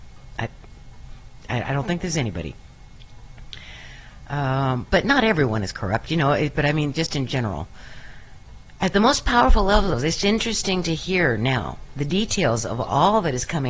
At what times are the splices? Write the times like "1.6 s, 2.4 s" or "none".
none